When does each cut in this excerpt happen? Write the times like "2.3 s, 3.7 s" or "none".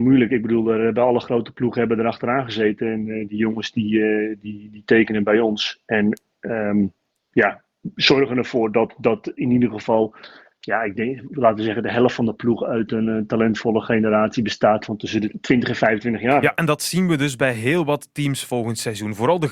none

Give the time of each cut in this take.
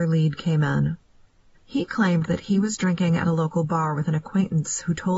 1.5 s

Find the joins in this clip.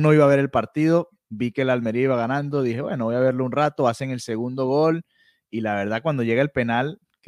none

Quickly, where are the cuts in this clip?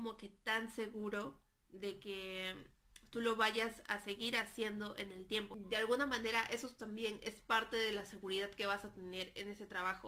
none

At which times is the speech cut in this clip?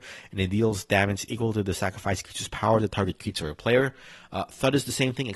none

